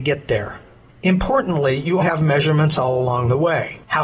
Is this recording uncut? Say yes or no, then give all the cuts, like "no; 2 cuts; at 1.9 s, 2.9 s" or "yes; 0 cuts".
no; 1 cut; at 2.0 s